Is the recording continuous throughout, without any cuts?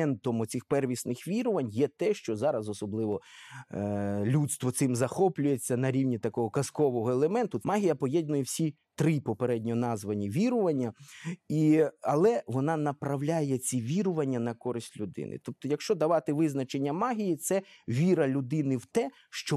no; 1 cut; at 7.6 s

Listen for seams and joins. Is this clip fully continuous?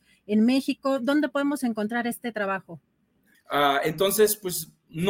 no; 1 cut; at 3.3 s

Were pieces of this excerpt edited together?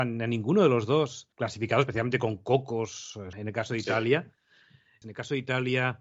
yes; 3 cuts; at 1.3 s, 3.3 s, 5.0 s

